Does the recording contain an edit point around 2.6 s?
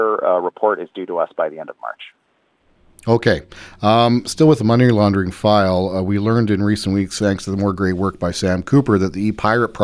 no; 0 cuts

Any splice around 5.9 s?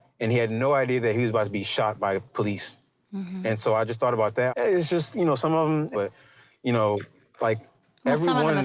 yes; 2 cuts; at 4.5 s, 5.9 s

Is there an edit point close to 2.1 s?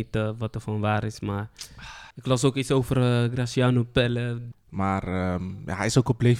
yes; 2 cuts; at 2.1 s, 4.5 s

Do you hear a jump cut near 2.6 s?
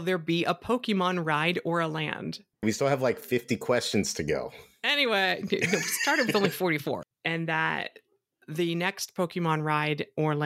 yes; 2 cuts; at 2.6 s, 7.0 s

